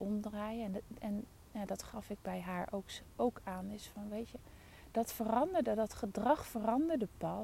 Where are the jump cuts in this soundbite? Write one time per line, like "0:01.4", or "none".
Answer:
none